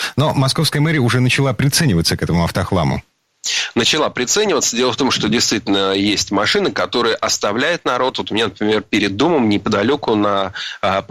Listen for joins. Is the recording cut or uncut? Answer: uncut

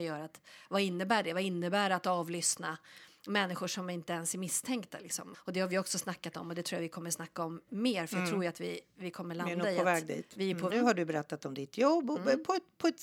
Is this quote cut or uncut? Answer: cut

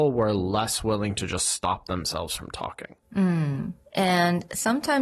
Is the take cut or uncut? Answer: uncut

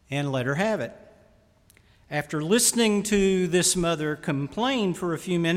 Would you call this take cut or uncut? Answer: uncut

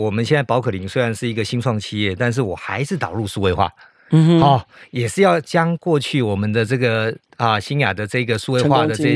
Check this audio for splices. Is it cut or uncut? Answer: uncut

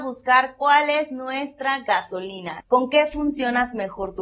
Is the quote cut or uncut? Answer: cut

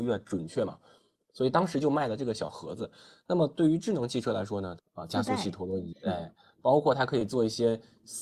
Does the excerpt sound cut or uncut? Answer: cut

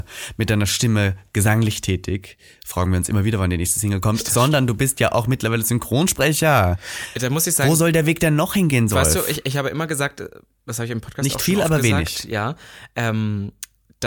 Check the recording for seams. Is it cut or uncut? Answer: uncut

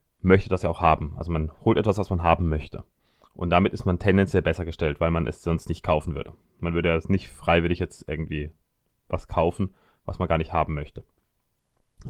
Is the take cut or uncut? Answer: uncut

